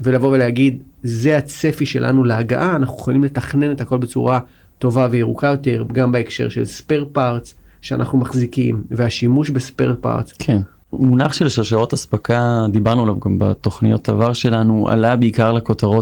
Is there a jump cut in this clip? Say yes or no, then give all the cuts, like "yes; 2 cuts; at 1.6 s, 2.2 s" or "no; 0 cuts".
no; 0 cuts